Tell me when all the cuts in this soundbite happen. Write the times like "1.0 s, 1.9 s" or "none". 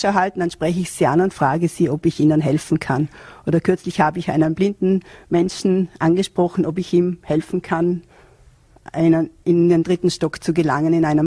none